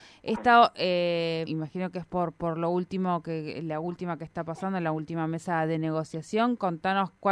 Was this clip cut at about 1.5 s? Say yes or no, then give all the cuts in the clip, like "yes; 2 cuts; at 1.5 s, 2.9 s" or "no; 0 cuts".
yes; 1 cut; at 1.5 s